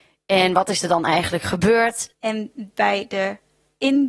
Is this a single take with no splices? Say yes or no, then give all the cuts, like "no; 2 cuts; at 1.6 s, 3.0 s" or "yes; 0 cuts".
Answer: no; 1 cut; at 2.1 s